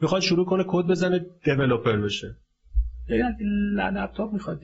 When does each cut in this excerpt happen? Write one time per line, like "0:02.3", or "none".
none